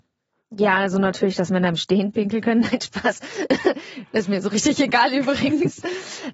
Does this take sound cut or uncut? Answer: uncut